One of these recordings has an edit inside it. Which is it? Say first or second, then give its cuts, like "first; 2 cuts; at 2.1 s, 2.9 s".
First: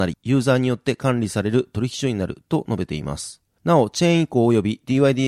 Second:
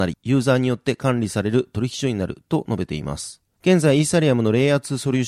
second; 1 cut; at 3.6 s